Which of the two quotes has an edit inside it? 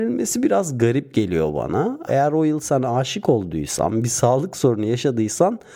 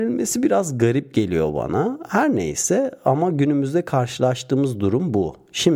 first; 1 cut; at 2.1 s

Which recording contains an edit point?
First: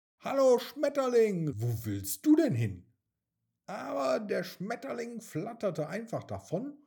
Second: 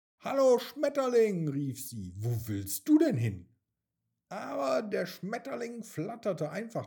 first; 1 cut; at 1.5 s

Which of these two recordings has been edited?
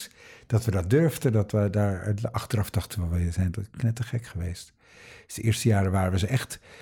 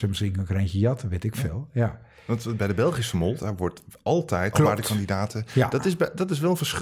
second; 2 cuts; at 3.4 s, 4.5 s

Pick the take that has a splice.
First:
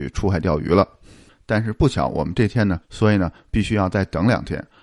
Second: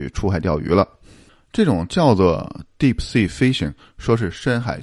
first; 2 cuts; at 1.3 s, 2.8 s

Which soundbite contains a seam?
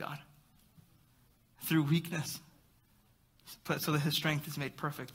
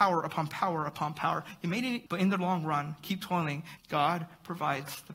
second; 2 cuts; at 2.1 s, 3.8 s

